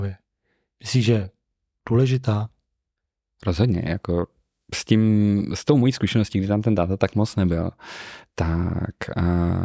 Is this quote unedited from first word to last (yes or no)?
yes